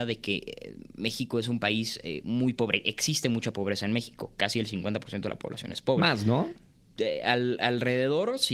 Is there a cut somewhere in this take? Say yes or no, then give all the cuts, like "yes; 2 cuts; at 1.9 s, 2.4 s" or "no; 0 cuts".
no; 0 cuts